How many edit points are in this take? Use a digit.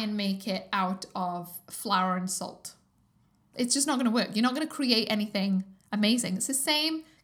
1